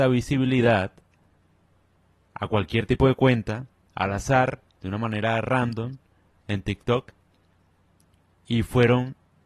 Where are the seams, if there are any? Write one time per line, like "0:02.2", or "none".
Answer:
0:06.3